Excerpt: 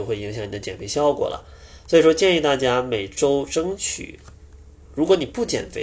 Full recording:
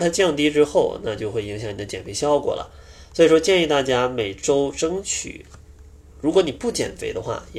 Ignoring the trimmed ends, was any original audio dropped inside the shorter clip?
no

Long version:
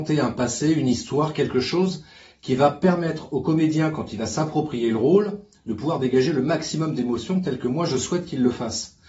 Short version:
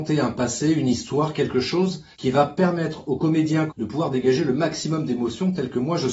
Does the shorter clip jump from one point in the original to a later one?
yes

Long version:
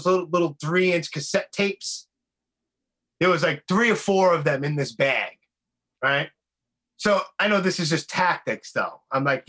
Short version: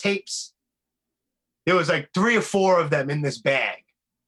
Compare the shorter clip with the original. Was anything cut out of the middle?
no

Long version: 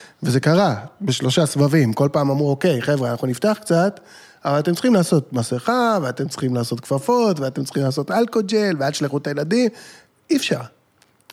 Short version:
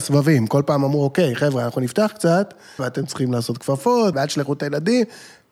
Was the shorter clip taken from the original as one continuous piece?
no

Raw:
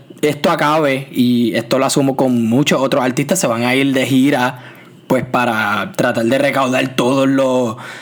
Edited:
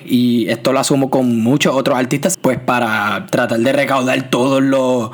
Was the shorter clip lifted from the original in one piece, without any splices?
no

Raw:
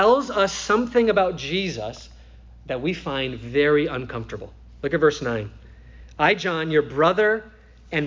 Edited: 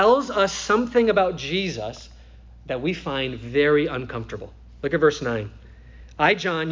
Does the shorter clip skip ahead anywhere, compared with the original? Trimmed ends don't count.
no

